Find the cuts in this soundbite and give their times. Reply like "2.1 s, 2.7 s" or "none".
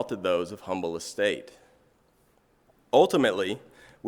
2.9 s